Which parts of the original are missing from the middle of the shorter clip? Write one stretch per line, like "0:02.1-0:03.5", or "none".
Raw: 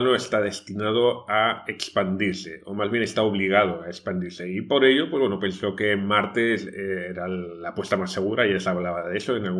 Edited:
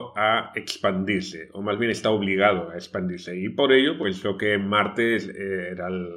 0:05.1-0:05.4